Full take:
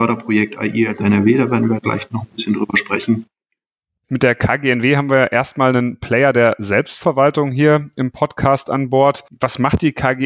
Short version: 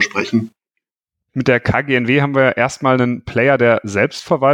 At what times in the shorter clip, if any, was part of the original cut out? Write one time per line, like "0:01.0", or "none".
none